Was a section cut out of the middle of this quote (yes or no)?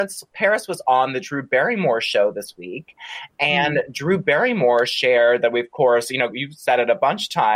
yes